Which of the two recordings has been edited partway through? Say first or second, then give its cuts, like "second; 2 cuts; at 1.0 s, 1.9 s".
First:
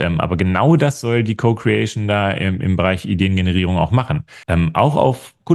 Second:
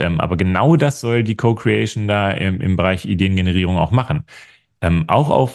first; 1 cut; at 4.4 s